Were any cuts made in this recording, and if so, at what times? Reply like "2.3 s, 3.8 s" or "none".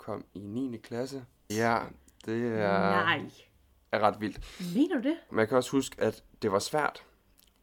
1.5 s, 5.3 s